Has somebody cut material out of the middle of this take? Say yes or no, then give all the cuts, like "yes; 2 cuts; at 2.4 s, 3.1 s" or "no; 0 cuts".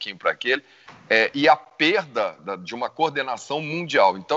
yes; 1 cut; at 2.4 s